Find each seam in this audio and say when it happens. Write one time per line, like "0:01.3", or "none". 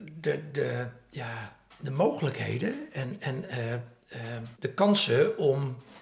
0:04.5